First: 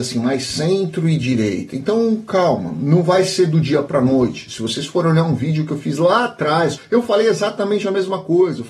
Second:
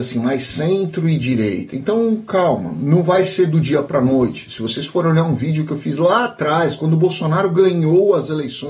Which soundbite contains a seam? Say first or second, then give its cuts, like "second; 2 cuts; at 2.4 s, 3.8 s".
first; 1 cut; at 6.8 s